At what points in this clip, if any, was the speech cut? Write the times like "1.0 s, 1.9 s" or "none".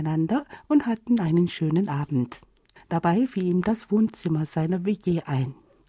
2.8 s